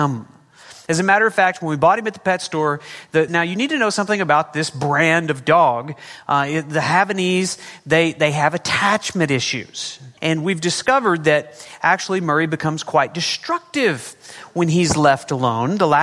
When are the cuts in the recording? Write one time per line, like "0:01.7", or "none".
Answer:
0:03.3
0:10.2

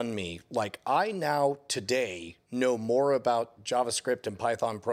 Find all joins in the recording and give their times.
none

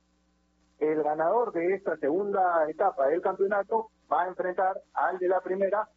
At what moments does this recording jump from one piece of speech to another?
none

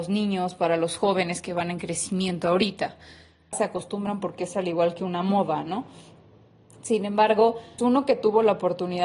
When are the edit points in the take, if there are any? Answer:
0:03.5
0:07.8

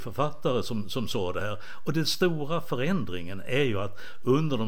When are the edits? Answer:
none

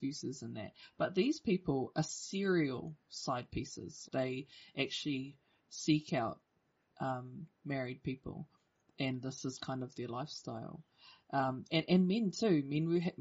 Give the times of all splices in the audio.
0:04.1

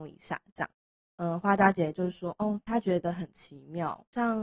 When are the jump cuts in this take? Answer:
0:01.1

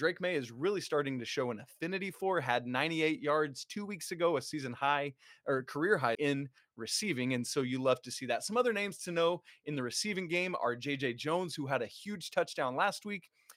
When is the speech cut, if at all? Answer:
0:06.1

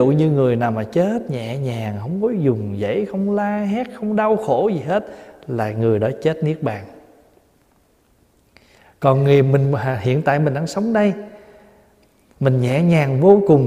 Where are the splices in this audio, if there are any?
none

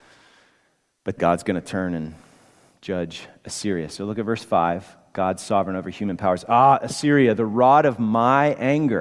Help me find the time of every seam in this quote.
0:01.2

